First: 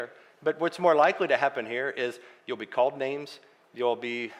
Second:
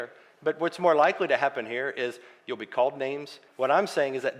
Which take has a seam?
second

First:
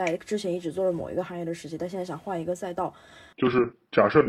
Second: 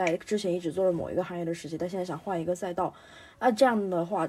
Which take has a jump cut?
first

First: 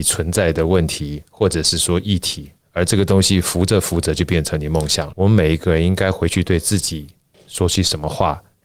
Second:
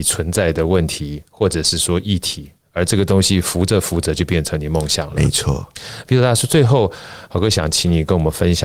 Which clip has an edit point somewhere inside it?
first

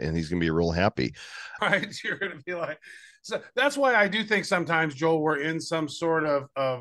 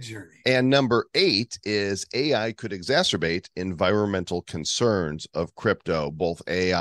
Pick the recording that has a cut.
first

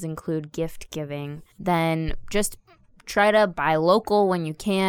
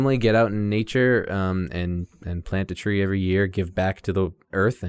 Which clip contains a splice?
first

